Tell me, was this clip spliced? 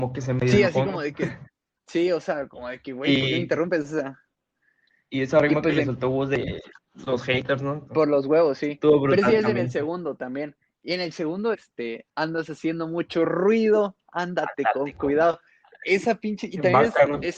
yes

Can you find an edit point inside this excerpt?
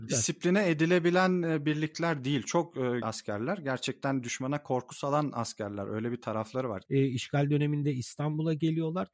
yes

